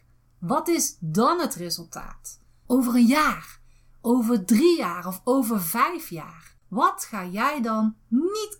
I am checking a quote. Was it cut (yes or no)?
yes